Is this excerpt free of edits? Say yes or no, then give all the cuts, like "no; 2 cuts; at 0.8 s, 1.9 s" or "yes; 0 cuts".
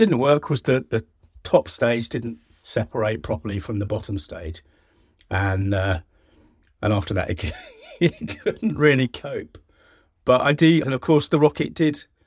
no; 1 cut; at 10.8 s